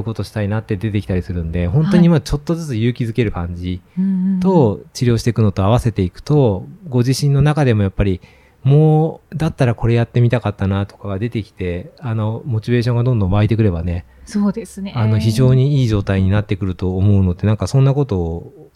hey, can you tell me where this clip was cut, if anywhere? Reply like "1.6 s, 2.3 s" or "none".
9.3 s

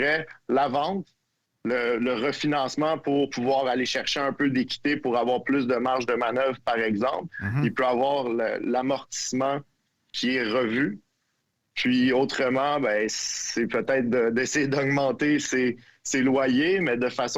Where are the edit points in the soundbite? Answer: none

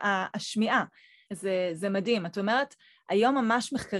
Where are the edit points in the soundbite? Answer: 1.3 s

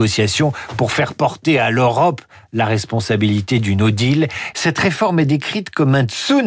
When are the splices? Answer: 4.5 s

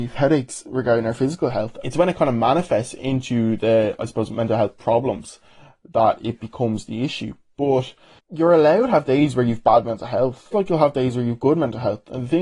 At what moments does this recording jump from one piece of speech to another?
1.8 s, 10.5 s

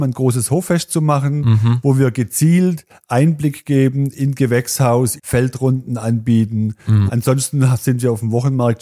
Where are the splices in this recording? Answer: 5.2 s, 7.1 s

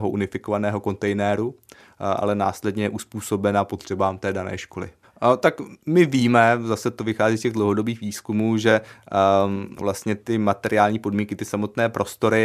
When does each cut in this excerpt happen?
5.0 s

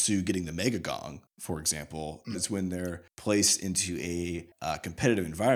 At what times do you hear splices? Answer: 2.3 s

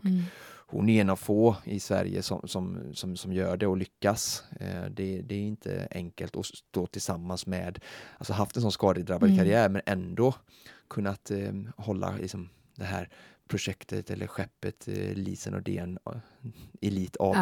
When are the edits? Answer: none

